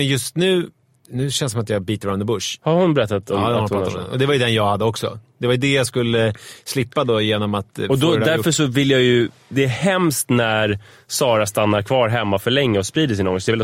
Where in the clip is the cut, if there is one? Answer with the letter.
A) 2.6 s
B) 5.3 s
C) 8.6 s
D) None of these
A